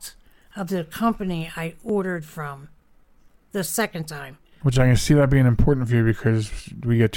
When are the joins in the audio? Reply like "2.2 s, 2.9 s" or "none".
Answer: 4.6 s